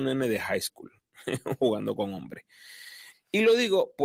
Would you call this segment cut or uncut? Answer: cut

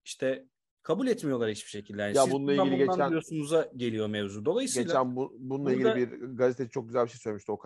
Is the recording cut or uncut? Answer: uncut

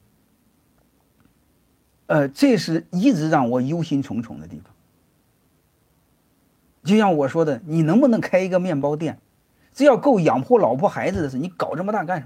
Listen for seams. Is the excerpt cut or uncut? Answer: uncut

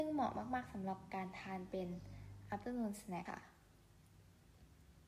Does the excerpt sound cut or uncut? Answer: cut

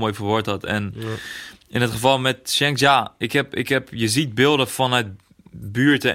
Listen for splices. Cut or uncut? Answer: uncut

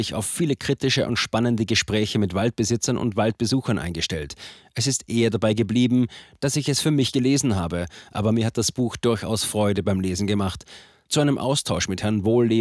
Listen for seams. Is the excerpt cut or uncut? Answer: uncut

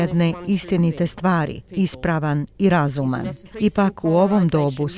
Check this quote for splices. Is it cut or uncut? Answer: cut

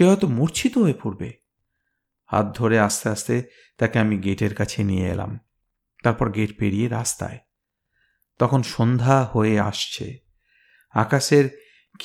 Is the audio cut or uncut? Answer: uncut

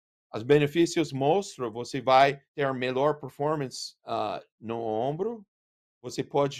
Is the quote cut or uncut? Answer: cut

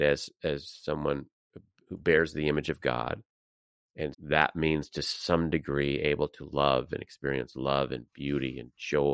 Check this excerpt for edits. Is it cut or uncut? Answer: cut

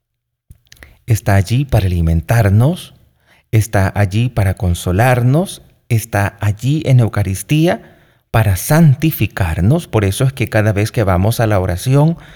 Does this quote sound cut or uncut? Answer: uncut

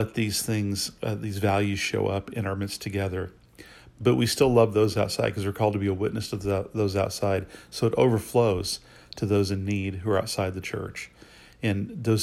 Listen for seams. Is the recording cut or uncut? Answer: uncut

